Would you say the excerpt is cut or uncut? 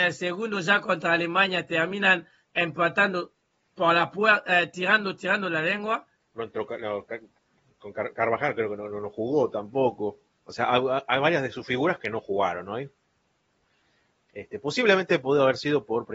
cut